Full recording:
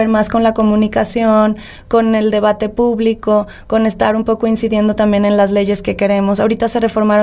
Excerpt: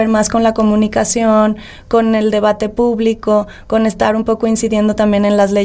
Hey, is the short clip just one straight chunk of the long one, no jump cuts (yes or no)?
yes